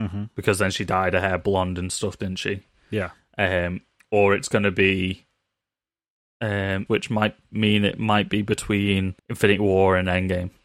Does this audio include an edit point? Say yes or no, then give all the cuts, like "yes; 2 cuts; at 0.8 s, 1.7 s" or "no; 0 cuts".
yes; 2 cuts; at 6.9 s, 9.2 s